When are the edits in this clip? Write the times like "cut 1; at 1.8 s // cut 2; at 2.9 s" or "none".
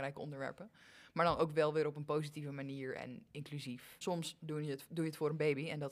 cut 1; at 4.0 s